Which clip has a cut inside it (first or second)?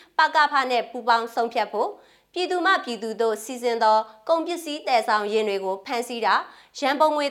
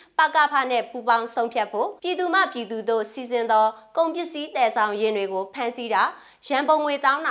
second